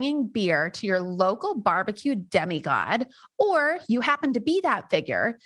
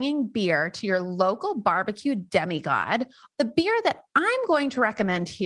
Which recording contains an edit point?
second; 1 cut; at 3.3 s

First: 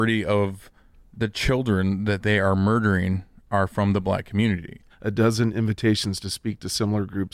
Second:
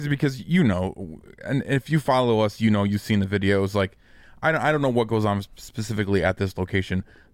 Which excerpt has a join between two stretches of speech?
first; 1 cut; at 4.9 s

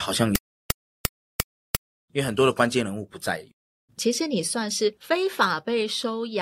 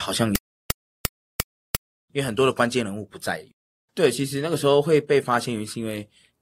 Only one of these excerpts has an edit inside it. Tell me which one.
second; 1 cut; at 3.9 s

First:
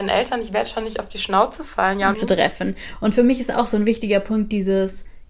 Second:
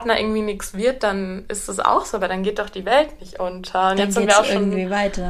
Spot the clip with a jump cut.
first; 1 cut; at 2.1 s

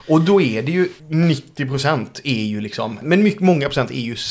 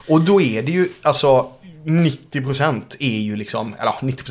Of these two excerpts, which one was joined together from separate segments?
first; 2 cuts; at 1.0 s, 3.0 s

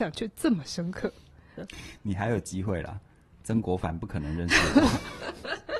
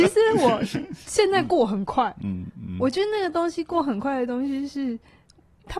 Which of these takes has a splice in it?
first; 1 cut; at 1.6 s

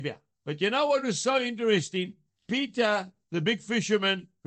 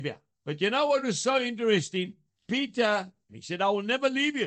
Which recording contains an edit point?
second; 1 cut; at 3.3 s

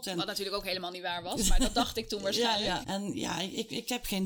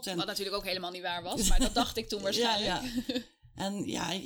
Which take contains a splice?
first; 1 cut; at 2.8 s

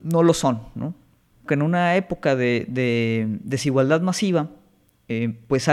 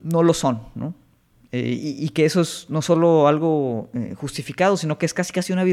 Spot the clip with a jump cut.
first; 1 cut; at 1.5 s

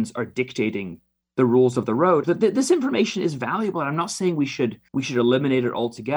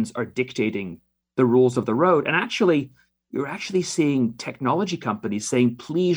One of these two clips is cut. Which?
first; 2 cuts; at 2.2 s, 4.9 s

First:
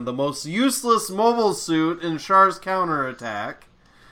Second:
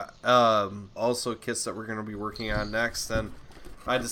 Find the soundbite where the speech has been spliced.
second; 1 cut; at 1.0 s

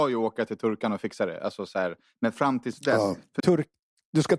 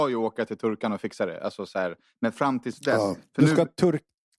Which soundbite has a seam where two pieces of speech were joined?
first; 1 cut; at 3.4 s

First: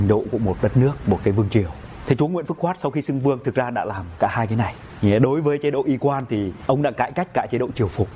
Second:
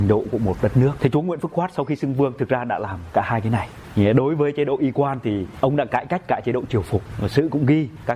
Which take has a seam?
second; 1 cut; at 1.0 s

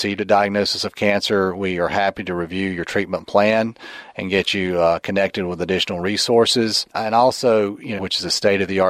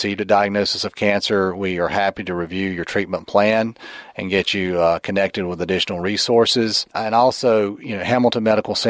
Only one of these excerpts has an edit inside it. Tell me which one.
first; 1 cut; at 8.0 s

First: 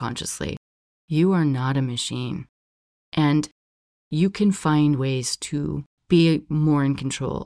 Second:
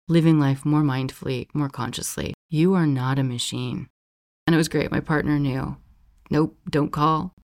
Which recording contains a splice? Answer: second; 2 cuts; at 2.4 s, 4.3 s

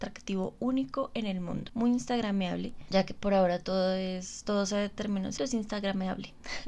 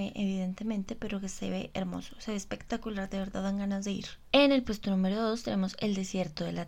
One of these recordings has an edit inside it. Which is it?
first; 1 cut; at 5.4 s

